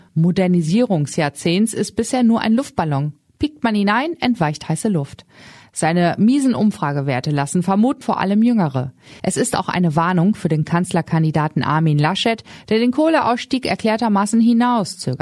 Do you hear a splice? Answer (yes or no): yes